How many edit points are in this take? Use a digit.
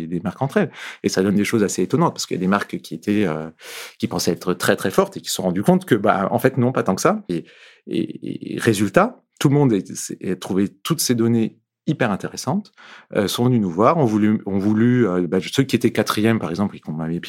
1